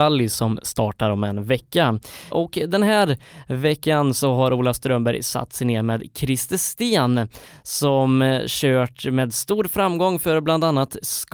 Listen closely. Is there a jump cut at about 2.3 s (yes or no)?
yes